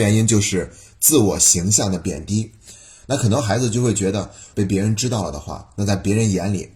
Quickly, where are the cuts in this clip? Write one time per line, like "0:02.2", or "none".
0:04.5